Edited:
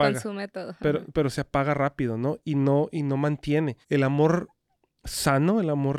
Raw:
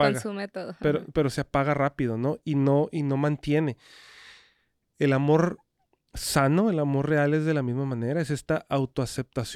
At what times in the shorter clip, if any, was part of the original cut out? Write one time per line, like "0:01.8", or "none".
0:03.8